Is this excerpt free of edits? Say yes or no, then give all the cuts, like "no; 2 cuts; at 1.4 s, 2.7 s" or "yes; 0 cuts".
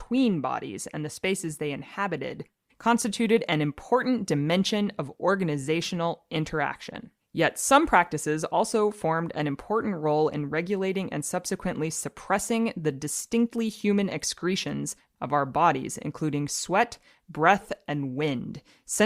no; 1 cut; at 7.2 s